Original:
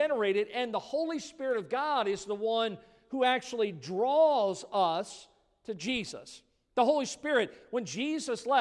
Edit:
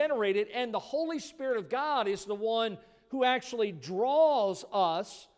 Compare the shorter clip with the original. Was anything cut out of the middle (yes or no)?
no